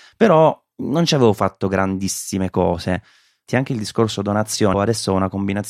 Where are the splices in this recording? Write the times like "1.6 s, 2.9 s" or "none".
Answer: 3.5 s, 4.7 s